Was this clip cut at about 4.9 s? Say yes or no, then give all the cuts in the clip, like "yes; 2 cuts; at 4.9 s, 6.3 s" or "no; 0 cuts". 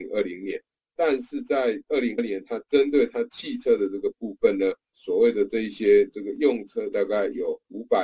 yes; 3 cuts; at 2.2 s, 4.9 s, 6.9 s